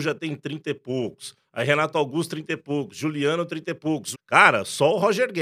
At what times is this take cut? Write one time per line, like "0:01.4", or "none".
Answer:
0:04.1